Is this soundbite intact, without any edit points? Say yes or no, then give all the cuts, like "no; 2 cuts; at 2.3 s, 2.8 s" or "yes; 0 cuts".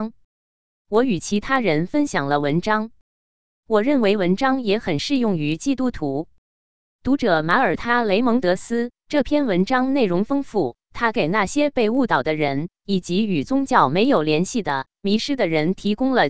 yes; 0 cuts